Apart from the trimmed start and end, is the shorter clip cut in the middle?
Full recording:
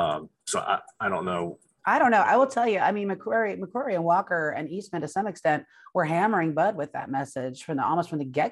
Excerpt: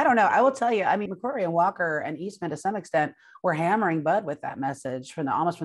yes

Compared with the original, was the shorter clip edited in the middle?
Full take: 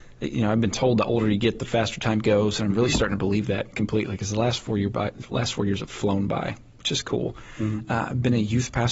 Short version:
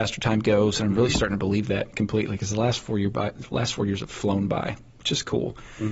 no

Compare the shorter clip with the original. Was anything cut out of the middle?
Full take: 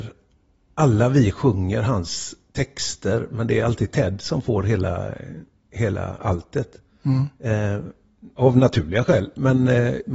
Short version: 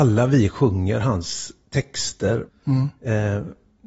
yes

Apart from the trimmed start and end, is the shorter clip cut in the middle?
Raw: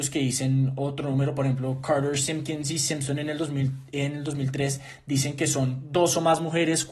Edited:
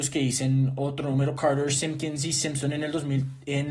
yes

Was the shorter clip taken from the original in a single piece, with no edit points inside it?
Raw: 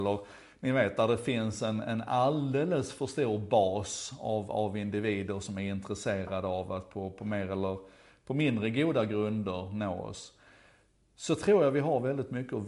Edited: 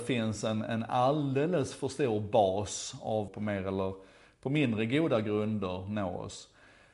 no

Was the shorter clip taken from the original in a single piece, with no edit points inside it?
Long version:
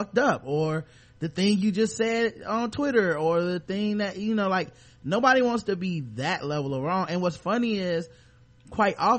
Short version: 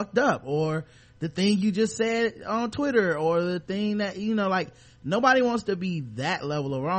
yes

